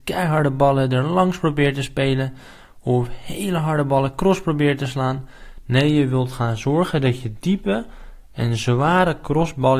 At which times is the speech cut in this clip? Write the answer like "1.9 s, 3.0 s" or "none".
none